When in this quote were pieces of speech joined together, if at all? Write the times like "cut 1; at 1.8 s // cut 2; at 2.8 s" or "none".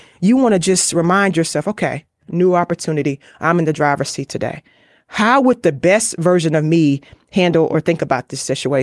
cut 1; at 2.3 s